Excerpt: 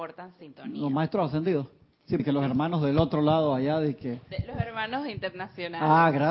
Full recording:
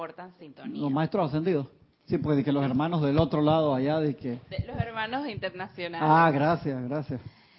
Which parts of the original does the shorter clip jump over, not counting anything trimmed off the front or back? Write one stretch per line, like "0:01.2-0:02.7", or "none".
0:02.2-0:02.4